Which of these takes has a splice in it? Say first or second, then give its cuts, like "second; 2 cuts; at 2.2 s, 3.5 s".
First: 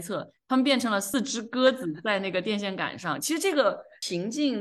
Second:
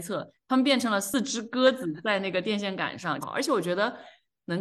second; 1 cut; at 3.2 s